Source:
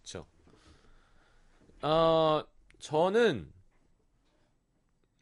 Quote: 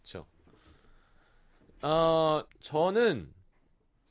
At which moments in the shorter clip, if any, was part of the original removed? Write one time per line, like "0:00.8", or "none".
0:02.5